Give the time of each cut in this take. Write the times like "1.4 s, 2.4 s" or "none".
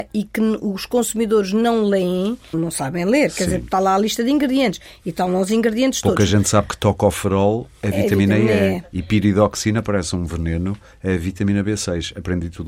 2.5 s